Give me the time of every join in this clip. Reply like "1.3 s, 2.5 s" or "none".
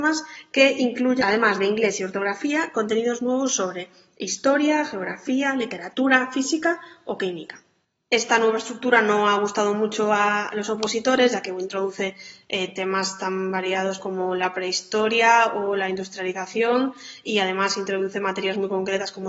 1.2 s

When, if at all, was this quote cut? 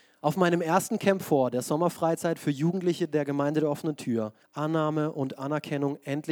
4.4 s

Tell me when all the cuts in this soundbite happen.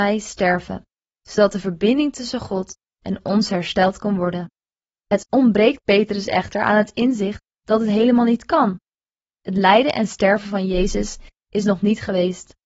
4.9 s

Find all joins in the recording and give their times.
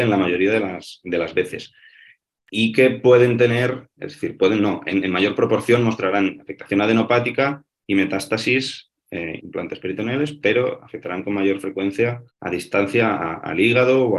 4.0 s, 9.4 s, 12.3 s

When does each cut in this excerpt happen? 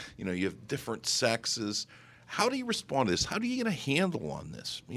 none

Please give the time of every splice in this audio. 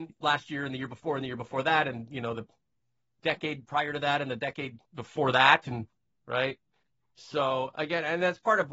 4.9 s

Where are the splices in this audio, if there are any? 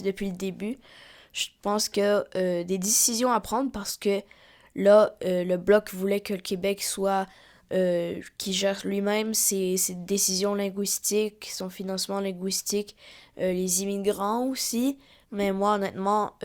15.2 s

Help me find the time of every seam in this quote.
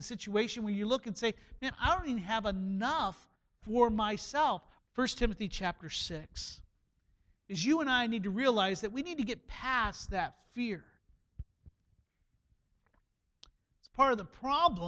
4.8 s

